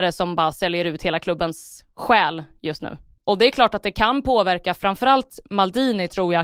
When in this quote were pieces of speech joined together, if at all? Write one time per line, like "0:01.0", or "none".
0:03.2